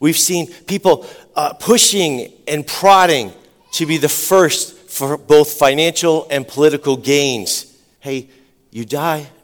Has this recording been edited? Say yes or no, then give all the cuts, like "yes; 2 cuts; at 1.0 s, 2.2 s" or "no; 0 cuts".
yes; 1 cut; at 8.0 s